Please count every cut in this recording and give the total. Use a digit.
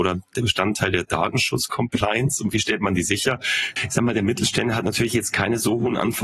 1